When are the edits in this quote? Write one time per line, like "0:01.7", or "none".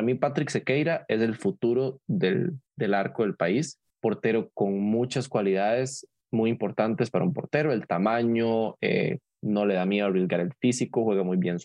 0:02.7